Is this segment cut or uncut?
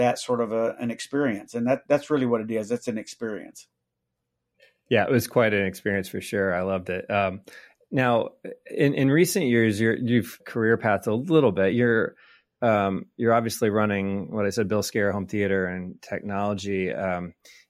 cut